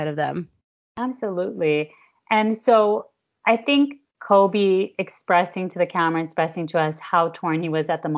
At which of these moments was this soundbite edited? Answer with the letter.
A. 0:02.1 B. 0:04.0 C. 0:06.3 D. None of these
B